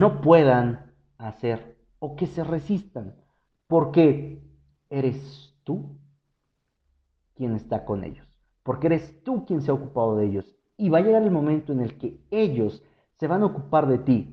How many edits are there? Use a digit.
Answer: 0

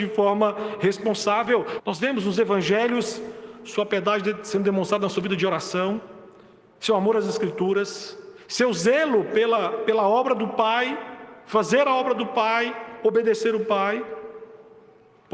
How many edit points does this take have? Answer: 1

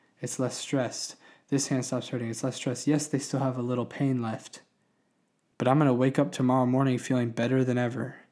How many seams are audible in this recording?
1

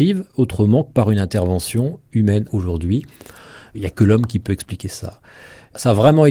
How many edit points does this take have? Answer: 1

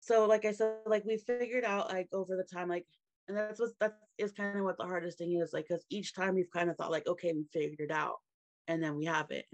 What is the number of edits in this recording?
0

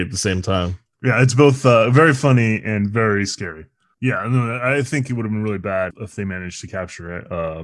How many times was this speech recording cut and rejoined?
2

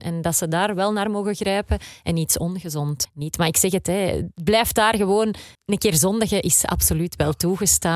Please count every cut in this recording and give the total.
3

